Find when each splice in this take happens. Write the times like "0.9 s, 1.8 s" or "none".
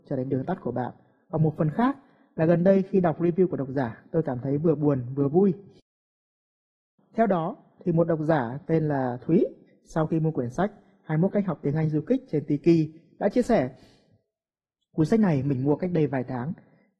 none